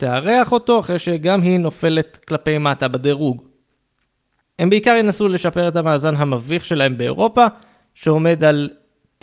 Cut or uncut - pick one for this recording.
cut